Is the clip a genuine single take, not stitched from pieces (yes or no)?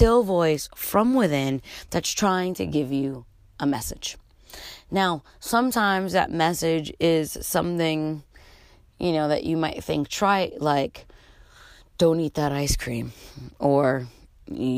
yes